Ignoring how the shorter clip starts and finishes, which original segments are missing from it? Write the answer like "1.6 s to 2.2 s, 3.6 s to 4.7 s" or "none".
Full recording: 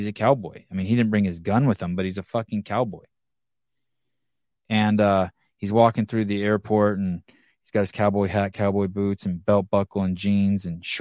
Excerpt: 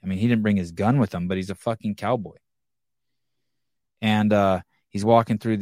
none